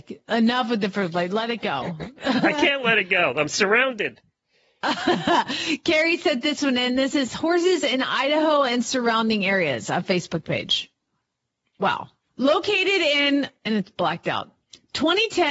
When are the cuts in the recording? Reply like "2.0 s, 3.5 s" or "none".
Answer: 12.4 s